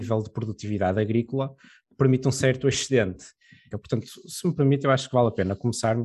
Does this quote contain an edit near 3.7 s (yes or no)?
yes